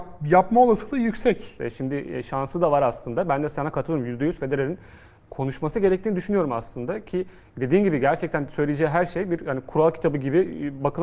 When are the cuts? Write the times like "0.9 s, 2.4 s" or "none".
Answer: 1.6 s